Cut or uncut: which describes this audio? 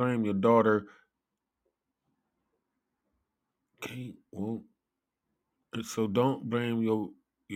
uncut